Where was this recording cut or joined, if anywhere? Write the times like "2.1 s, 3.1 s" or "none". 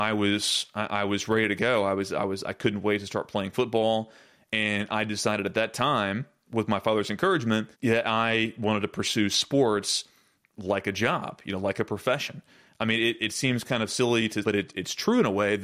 7.7 s, 14.4 s